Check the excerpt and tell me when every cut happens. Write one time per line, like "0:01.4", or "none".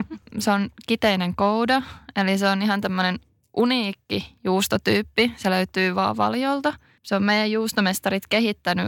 none